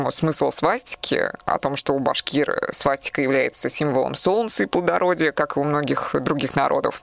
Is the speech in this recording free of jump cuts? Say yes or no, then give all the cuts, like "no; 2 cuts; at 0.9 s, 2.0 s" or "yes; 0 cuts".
yes; 0 cuts